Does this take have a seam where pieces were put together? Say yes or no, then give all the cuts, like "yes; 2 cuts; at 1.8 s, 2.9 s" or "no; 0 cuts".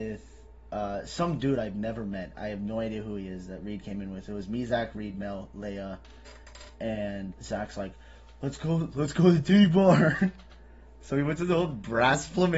yes; 1 cut; at 7.3 s